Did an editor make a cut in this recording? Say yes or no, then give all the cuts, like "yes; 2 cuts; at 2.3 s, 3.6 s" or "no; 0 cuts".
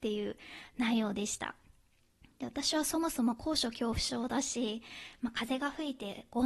no; 0 cuts